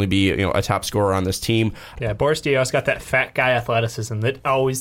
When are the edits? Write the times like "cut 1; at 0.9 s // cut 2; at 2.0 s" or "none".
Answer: cut 1; at 2.0 s